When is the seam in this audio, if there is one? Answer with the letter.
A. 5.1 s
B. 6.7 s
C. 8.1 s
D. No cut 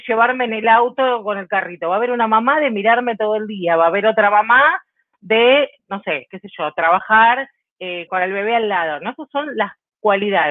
C